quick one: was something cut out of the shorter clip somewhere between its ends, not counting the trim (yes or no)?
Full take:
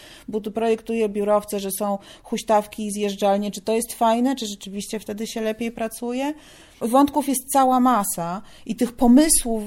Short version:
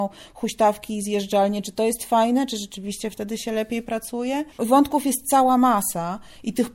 yes